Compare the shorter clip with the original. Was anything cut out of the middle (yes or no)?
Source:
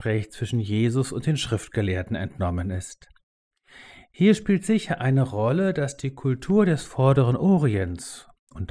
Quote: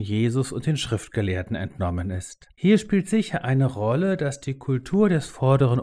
yes